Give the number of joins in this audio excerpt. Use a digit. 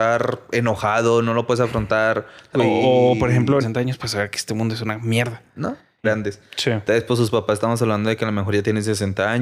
3